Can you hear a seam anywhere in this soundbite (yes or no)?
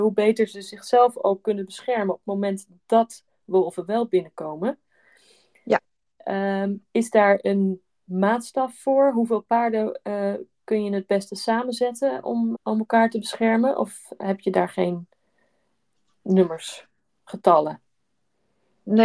yes